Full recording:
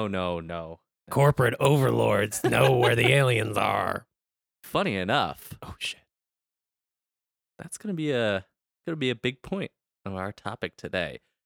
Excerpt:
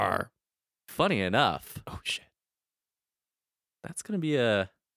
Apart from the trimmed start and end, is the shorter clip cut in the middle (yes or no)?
no